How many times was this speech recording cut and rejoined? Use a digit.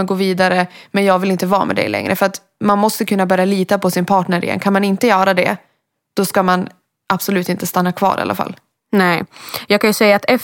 0